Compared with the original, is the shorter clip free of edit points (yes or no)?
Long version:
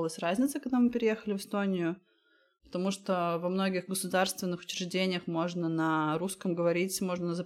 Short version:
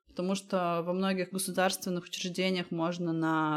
yes